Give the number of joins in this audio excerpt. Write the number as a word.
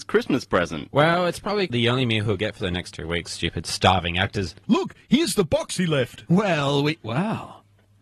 one